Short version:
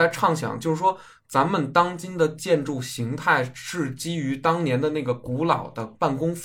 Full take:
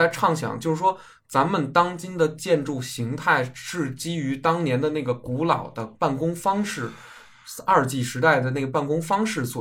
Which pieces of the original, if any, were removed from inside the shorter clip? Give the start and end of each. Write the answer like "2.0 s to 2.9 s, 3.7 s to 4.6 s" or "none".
none